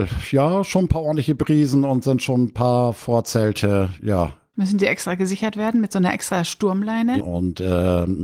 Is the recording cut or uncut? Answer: cut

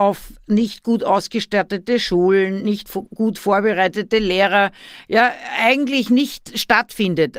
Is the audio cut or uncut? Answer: uncut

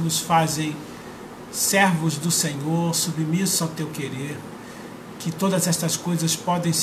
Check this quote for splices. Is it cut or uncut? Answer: uncut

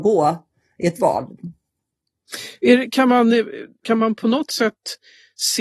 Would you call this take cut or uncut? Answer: cut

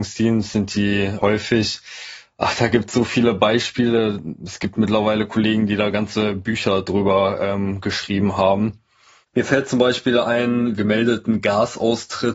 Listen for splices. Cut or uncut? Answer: cut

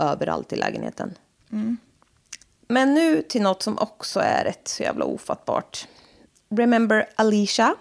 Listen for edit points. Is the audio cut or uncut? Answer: cut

